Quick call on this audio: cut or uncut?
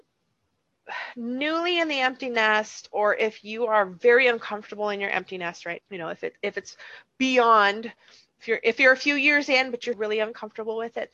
cut